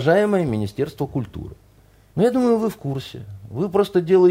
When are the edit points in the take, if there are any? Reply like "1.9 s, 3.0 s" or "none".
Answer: 2.1 s